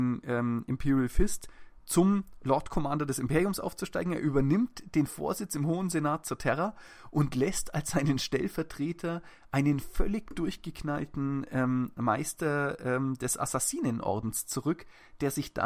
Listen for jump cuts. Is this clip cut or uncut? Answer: uncut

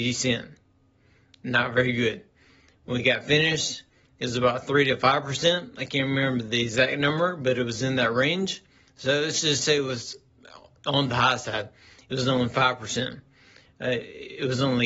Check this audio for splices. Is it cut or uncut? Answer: uncut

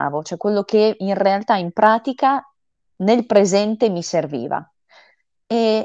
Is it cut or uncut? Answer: uncut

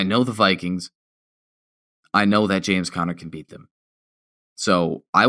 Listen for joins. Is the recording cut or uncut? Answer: uncut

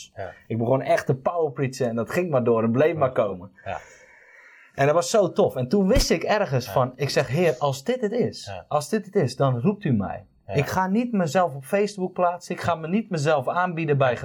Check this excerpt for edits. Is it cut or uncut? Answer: uncut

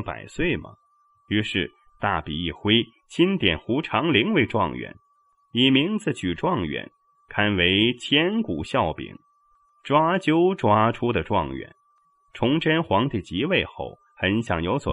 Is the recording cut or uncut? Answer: uncut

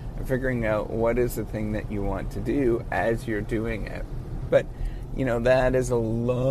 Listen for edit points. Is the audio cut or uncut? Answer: cut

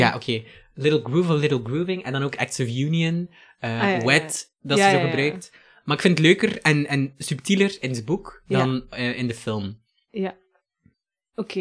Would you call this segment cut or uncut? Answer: uncut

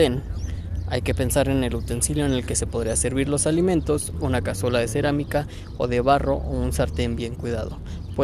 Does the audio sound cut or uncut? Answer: cut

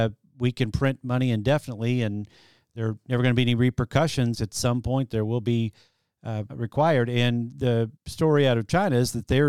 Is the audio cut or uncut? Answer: cut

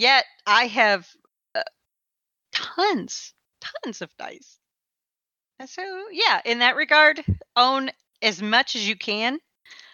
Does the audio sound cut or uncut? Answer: uncut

